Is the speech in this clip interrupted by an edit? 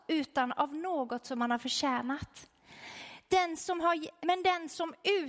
yes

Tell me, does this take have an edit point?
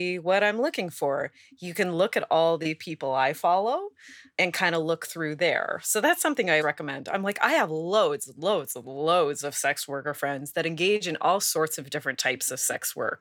yes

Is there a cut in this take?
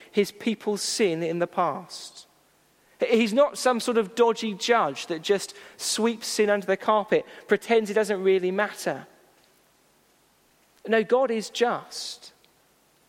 no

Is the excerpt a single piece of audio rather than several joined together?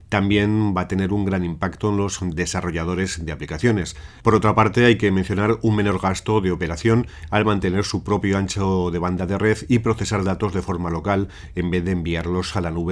no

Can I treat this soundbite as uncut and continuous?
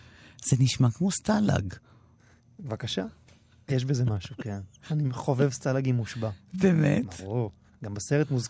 no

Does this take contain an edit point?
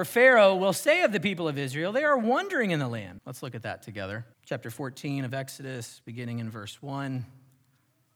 yes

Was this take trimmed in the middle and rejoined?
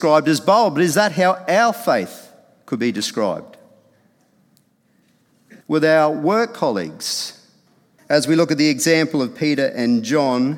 yes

